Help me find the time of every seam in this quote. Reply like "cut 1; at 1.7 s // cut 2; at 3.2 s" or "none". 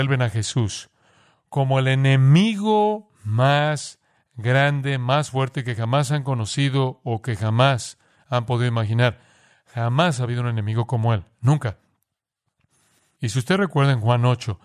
none